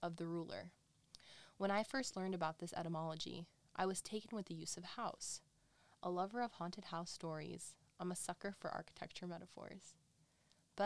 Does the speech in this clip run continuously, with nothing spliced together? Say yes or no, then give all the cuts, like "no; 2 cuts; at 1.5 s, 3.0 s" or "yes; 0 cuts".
yes; 0 cuts